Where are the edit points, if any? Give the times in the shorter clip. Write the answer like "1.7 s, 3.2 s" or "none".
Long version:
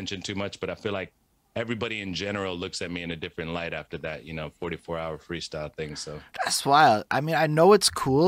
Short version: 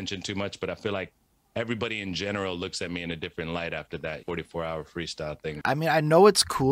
4.2 s, 5.6 s